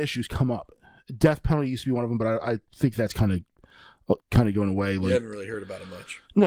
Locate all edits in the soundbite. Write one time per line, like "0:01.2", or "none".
0:04.2